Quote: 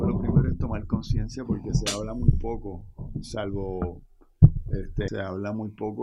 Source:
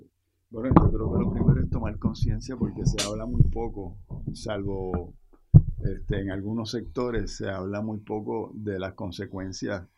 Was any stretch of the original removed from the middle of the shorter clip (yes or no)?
yes